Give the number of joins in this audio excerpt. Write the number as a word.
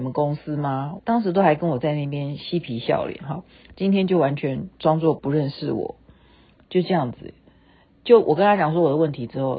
one